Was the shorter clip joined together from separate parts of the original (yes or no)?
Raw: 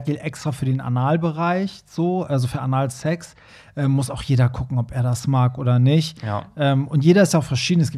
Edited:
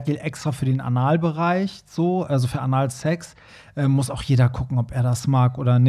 no